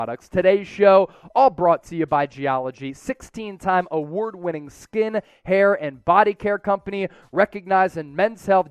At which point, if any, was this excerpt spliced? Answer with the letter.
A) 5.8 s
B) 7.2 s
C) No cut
C